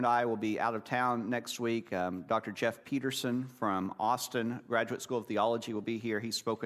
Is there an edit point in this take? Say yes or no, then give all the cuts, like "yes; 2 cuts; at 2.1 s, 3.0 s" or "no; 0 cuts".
no; 0 cuts